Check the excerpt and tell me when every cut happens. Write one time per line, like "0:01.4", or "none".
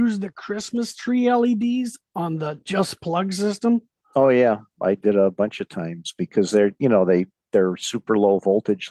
none